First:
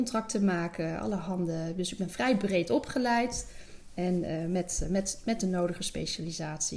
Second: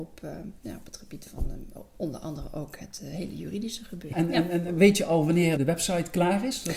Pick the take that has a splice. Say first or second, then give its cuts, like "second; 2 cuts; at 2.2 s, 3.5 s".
second; 2 cuts; at 4.1 s, 5.6 s